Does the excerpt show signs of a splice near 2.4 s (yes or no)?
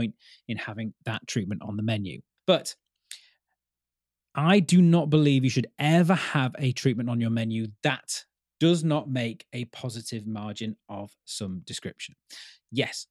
yes